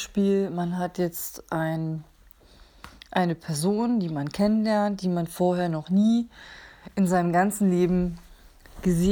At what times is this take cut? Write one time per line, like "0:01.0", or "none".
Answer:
none

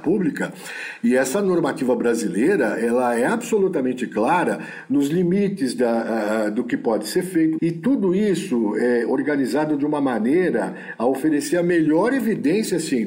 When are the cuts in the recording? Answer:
0:07.6

